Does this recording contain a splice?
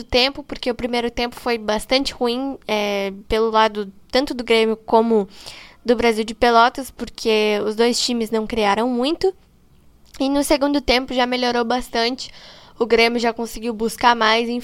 no; 0 cuts

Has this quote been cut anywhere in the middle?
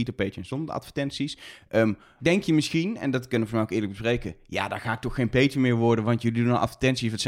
yes; 1 cut; at 2.2 s

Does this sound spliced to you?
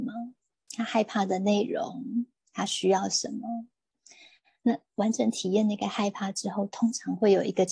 no; 0 cuts

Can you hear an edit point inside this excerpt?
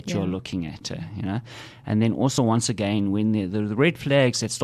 no; 0 cuts

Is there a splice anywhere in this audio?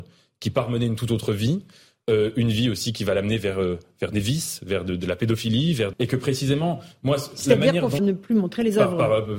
yes; 2 cuts; at 5.9 s, 8.0 s

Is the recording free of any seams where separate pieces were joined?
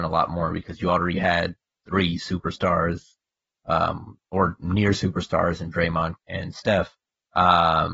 no; 1 cut; at 6.2 s

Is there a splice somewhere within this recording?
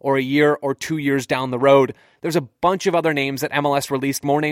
yes; 1 cut; at 2.2 s

